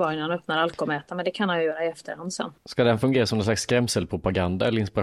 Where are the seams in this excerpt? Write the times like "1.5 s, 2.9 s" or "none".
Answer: none